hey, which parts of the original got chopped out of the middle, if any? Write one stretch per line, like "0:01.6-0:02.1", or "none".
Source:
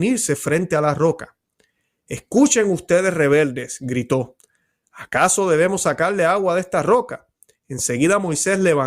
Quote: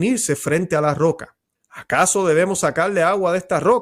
0:01.5-0:04.8